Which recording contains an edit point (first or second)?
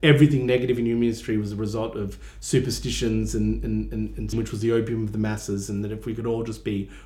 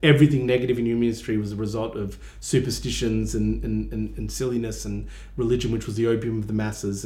first